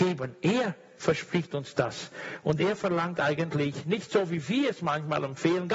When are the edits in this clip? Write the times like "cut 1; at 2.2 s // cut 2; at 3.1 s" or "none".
none